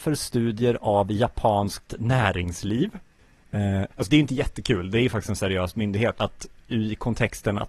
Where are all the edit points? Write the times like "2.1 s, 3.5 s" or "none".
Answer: 3.9 s, 6.2 s

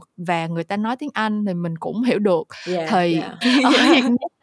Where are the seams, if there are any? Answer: 3.4 s

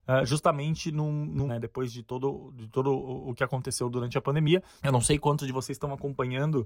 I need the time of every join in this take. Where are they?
1.5 s, 4.8 s

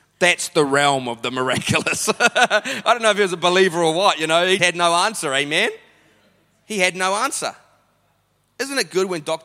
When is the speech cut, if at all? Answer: 4.6 s

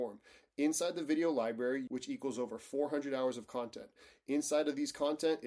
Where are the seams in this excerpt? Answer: 1.9 s

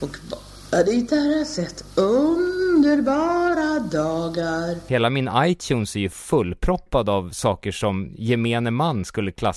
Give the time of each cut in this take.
none

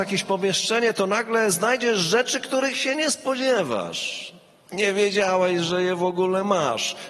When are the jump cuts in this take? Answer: none

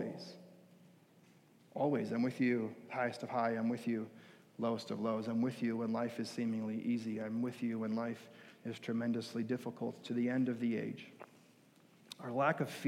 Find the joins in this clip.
none

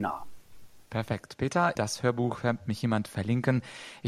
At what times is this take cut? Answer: 1.8 s

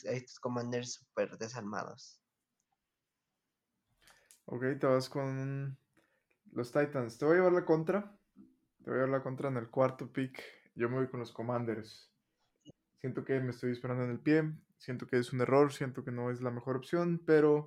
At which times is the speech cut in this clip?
none

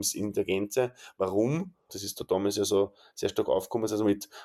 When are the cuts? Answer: 1.9 s

